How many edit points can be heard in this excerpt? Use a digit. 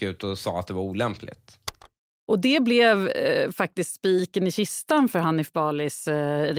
0